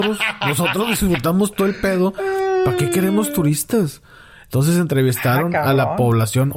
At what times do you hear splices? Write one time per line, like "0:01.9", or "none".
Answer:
none